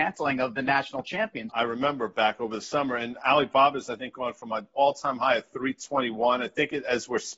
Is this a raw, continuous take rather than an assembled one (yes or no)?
no